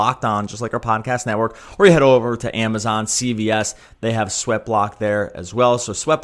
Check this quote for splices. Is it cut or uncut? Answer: uncut